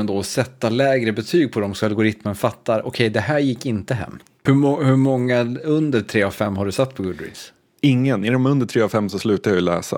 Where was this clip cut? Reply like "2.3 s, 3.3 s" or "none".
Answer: 4.5 s